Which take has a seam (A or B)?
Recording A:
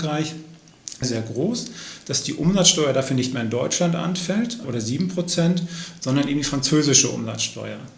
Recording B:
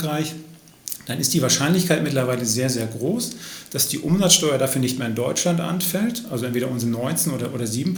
A